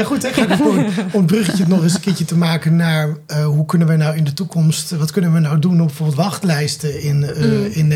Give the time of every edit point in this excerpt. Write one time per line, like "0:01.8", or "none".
none

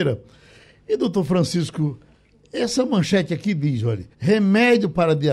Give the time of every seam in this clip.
0:04.1

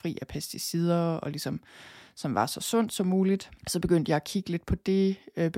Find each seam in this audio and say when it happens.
0:03.6

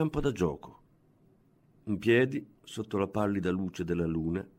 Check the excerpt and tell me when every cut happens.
none

